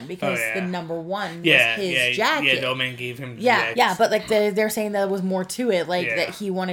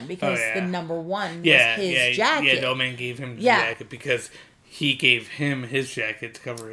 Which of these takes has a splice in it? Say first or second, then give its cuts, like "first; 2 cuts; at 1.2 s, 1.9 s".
first; 1 cut; at 3.7 s